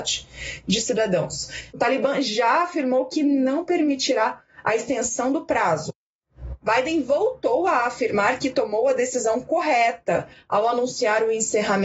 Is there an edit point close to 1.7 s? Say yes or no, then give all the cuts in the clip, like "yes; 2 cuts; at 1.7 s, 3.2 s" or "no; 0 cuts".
yes; 2 cuts; at 1.7 s, 6.6 s